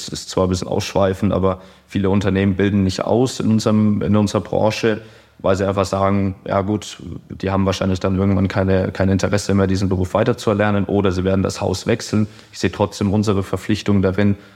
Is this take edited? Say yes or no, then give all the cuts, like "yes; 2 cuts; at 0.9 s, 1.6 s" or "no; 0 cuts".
no; 0 cuts